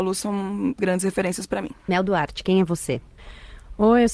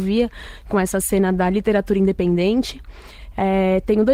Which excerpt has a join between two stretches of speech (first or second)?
first